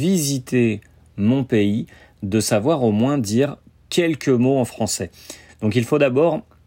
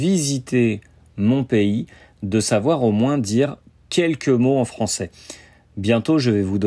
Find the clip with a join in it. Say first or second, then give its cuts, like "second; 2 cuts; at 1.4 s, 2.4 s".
first; 1 cut; at 5.5 s